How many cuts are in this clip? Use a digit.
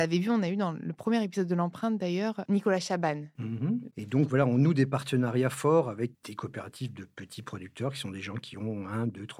2